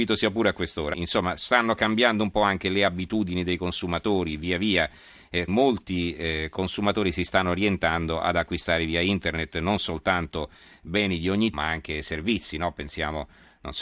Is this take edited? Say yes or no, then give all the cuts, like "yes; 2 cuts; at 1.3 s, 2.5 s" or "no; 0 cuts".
yes; 3 cuts; at 0.9 s, 5.5 s, 11.5 s